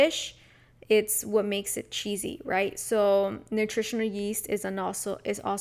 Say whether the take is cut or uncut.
uncut